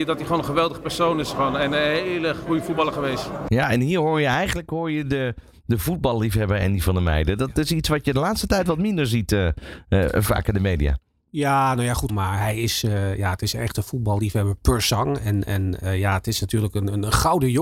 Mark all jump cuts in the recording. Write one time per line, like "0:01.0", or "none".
0:12.1
0:15.4